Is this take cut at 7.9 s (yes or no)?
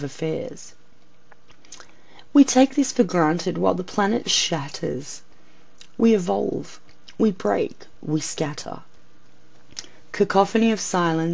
yes